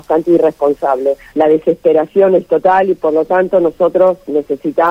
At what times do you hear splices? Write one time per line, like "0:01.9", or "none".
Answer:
0:01.3

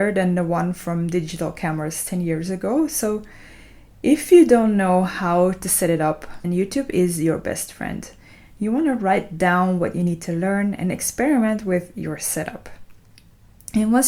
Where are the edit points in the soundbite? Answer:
0:06.4

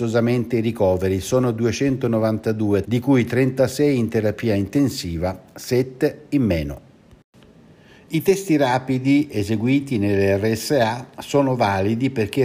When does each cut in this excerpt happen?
0:02.8

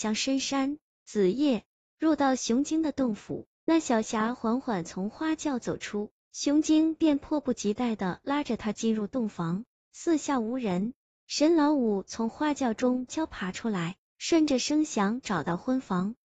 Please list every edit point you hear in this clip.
0:13.1

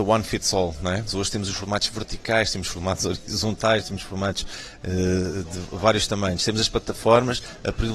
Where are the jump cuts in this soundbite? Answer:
0:01.1

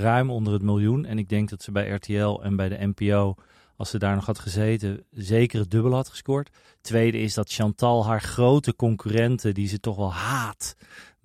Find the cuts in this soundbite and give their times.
none

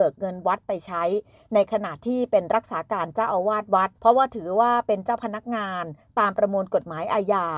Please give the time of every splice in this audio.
0:04.0

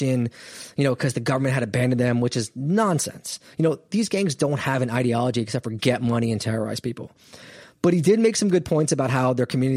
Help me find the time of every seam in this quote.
none

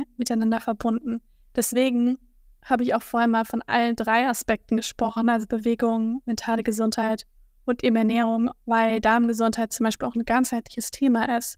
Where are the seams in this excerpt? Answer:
none

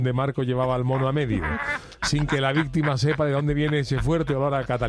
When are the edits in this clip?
none

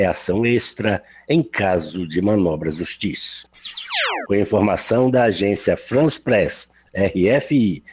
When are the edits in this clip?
none

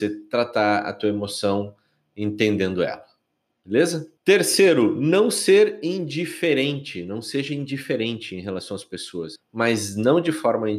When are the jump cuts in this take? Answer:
0:04.2
0:09.4

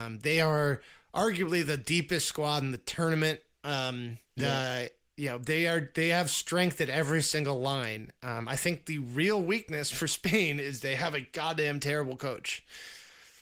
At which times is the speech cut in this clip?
0:04.4

